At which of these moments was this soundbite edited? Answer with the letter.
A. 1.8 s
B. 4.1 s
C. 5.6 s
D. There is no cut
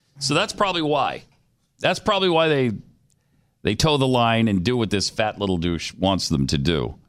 A